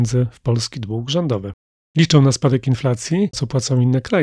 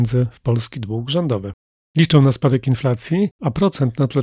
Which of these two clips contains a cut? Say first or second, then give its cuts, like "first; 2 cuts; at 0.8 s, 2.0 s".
first; 1 cut; at 3.3 s